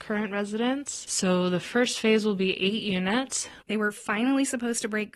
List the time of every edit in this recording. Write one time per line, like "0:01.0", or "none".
0:03.6